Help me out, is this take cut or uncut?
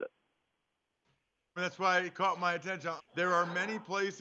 cut